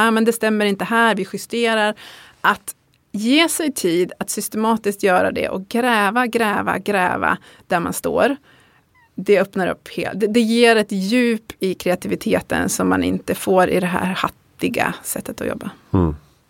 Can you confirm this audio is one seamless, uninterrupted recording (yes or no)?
yes